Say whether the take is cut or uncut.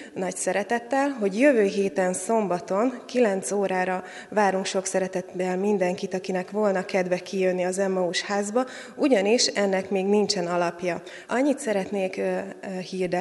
cut